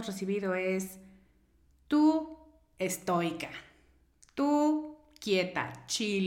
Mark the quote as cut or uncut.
uncut